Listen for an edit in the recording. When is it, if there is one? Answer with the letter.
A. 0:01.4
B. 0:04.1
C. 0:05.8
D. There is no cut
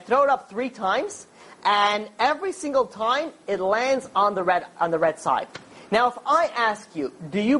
D